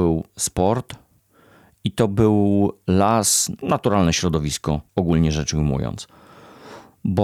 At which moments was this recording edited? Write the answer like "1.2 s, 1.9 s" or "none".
3.6 s, 4.9 s